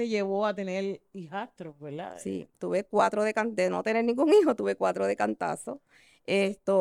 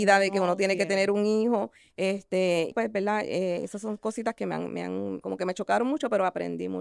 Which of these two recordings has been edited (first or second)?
second